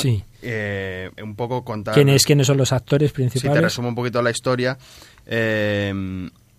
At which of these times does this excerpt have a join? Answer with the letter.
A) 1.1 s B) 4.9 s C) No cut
A